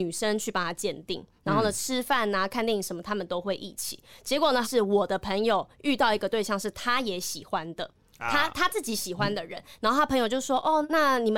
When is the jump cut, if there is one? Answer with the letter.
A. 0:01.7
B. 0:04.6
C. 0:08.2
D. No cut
B